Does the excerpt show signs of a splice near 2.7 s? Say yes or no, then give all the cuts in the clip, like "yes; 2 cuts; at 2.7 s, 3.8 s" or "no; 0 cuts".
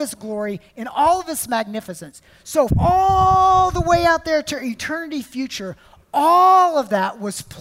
yes; 1 cut; at 2.7 s